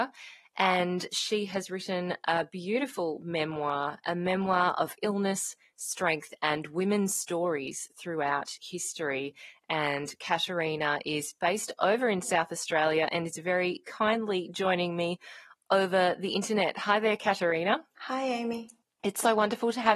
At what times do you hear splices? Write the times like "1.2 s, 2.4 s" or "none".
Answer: 4.0 s